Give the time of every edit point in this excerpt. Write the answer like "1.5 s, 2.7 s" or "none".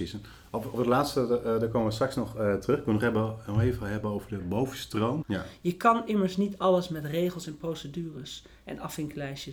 5.2 s